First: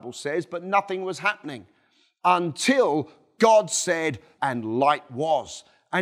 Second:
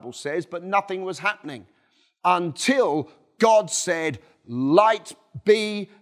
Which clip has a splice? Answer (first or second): first